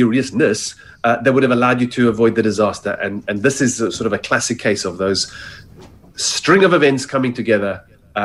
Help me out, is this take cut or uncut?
uncut